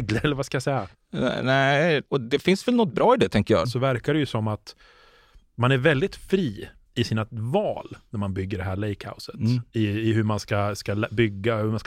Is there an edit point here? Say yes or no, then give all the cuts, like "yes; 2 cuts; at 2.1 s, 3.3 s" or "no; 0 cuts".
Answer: yes; 1 cut; at 3.6 s